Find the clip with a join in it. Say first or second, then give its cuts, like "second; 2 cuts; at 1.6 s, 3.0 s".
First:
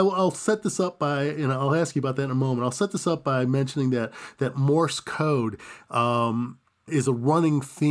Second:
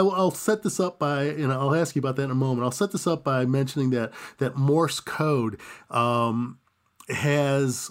first; 1 cut; at 6.9 s